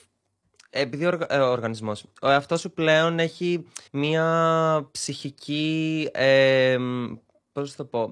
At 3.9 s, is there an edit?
yes; 1 cut; at 3.9 s

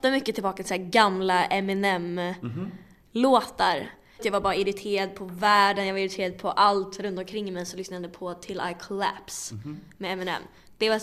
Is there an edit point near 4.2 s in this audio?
yes; 1 cut; at 4.2 s

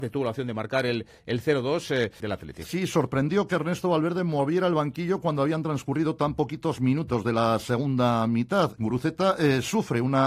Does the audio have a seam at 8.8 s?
yes; 2 cuts; at 2.2 s, 8.8 s

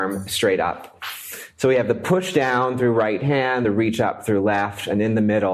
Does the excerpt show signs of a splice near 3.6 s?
no; 0 cuts

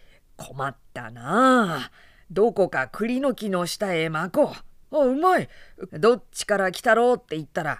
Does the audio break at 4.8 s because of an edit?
yes; 2 cuts; at 4.8 s, 5.9 s

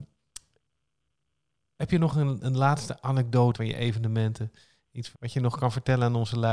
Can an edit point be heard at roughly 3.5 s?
yes; 2 cuts; at 3.5 s, 5.1 s

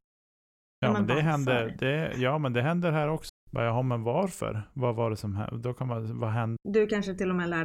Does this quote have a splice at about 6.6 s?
yes; 2 cuts; at 3.3 s, 6.6 s

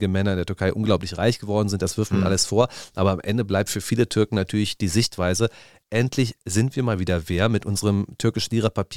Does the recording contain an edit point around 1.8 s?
yes; 1 cut; at 1.8 s

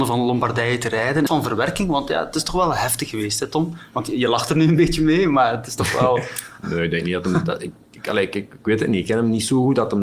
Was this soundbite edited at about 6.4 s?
no; 1 cut; at 1.3 s

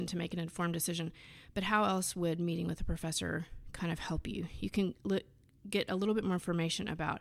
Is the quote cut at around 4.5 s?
no; 0 cuts

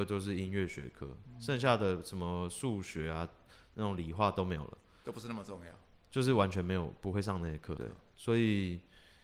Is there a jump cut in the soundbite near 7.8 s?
yes; 1 cut; at 7.8 s

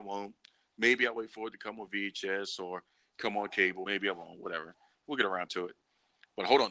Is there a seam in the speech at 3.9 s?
no; 0 cuts

